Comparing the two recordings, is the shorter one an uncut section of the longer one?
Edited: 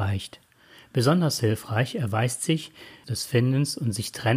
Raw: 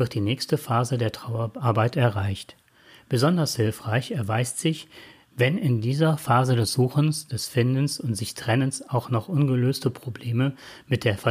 no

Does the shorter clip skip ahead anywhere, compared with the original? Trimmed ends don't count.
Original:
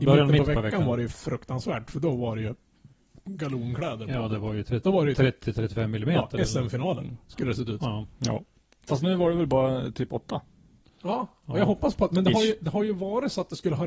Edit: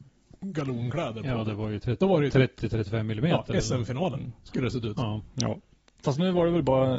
no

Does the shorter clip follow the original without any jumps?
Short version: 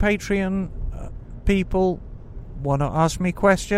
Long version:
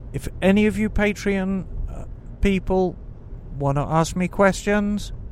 yes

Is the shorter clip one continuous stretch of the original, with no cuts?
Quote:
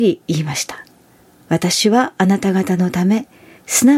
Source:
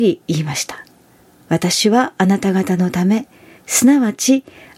yes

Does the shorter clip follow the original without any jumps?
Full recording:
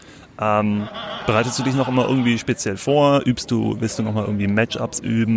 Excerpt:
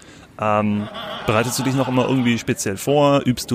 yes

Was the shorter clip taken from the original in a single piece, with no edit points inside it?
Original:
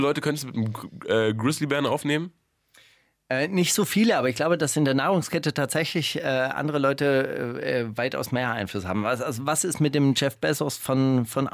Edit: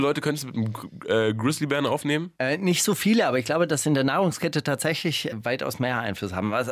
no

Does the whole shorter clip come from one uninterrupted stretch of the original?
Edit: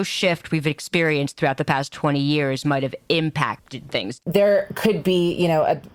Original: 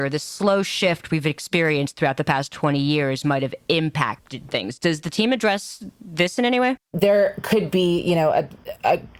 no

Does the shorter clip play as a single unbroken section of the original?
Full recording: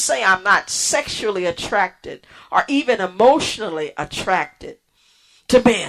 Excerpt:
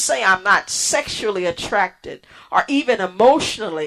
yes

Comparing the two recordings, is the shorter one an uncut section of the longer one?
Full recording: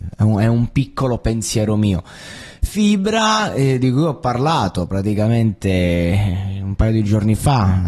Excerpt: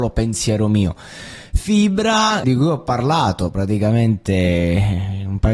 no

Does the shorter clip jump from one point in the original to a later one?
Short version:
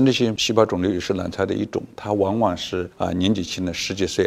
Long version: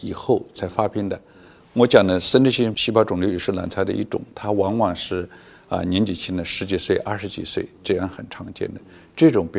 yes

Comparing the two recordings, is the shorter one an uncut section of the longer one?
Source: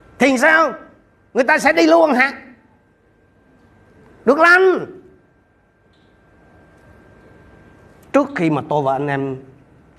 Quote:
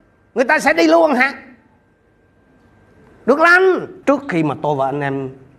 no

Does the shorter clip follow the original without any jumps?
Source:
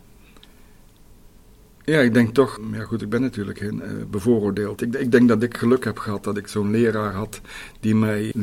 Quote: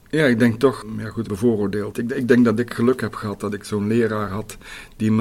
no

